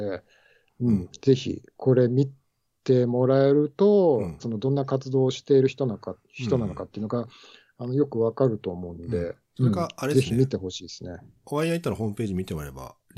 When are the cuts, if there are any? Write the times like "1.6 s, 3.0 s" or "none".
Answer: 4.4 s